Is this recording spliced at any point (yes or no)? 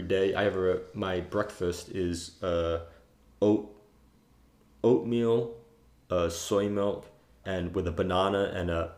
yes